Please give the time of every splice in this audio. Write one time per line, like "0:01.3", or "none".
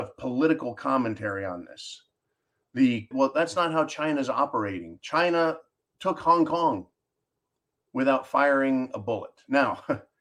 0:03.1